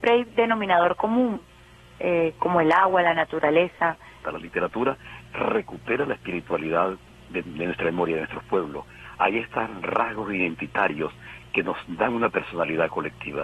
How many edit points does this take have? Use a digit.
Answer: 2